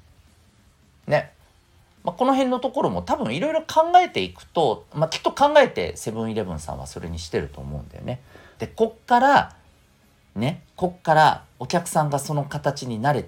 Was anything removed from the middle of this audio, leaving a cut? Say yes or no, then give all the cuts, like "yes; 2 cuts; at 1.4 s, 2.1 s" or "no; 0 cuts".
yes; 1 cut; at 8.6 s